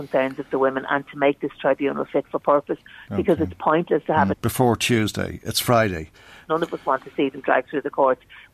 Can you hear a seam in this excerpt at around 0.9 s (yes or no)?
no